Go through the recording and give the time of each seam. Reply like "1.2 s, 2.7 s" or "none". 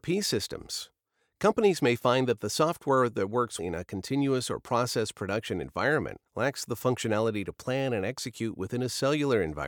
3.6 s, 6.3 s